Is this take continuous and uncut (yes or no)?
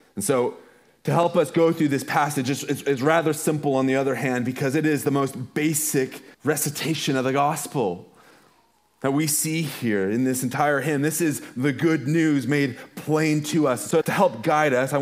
no